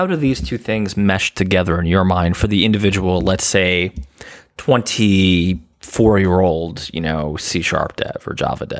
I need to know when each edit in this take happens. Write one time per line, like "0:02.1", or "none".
none